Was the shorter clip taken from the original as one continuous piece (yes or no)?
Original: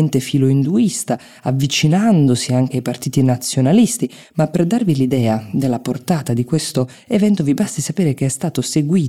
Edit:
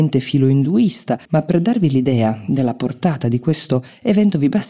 no